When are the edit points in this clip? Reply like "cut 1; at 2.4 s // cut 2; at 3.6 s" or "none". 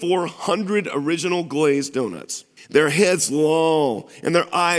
cut 1; at 2.6 s